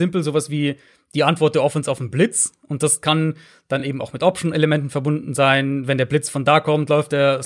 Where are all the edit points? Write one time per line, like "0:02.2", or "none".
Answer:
none